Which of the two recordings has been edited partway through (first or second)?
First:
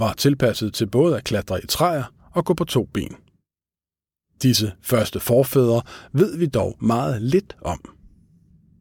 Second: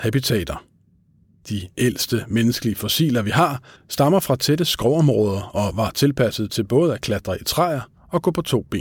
second